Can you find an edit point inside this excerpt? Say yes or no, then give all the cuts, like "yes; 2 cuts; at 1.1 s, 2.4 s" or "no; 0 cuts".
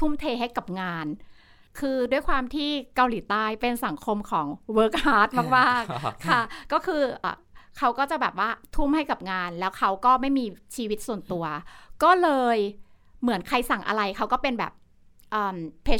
yes; 1 cut; at 7.2 s